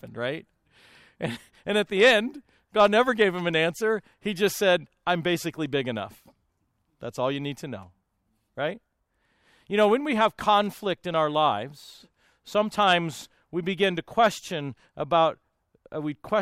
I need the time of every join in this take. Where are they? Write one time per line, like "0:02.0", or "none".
none